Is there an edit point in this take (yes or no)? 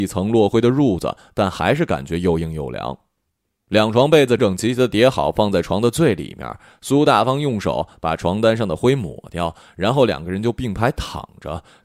yes